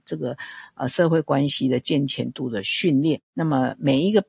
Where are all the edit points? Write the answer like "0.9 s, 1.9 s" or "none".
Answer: none